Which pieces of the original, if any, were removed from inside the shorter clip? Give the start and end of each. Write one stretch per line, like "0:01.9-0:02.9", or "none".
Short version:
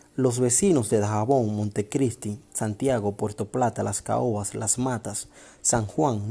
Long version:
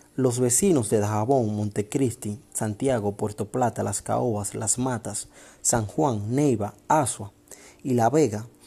none